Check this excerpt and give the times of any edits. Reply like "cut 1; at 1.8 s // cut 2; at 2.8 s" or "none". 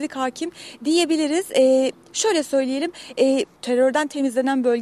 cut 1; at 3.6 s